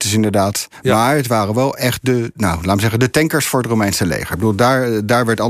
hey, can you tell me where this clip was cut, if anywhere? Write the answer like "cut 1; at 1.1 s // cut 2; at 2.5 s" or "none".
none